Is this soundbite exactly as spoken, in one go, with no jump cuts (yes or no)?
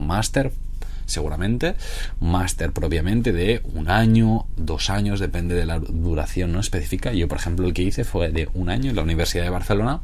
yes